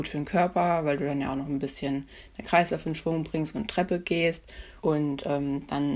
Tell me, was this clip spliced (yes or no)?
yes